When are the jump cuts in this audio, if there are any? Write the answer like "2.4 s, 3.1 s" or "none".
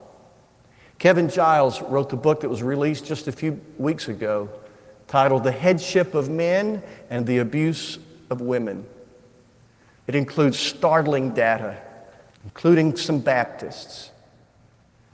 12.3 s

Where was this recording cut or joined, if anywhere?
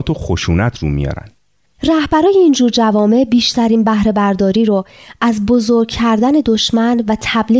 1.7 s

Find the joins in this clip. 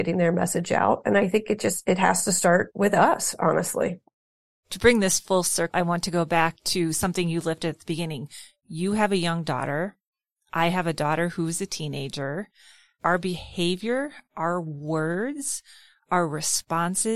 none

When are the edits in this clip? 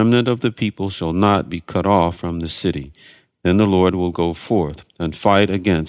none

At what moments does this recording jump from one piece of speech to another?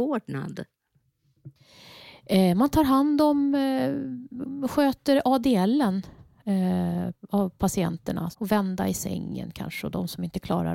8.3 s

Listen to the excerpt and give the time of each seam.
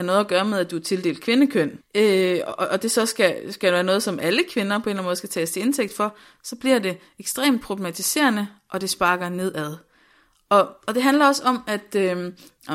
1.8 s

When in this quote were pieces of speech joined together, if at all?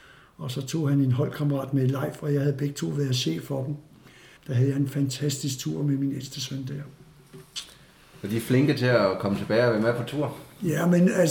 4.4 s

